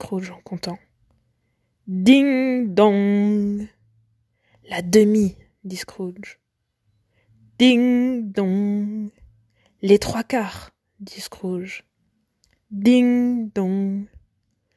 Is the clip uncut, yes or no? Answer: yes